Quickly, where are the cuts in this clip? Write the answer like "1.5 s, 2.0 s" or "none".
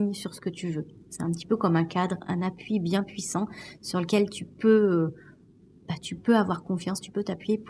none

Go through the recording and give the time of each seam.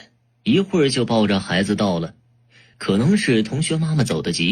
none

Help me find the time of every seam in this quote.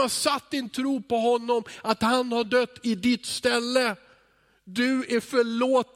none

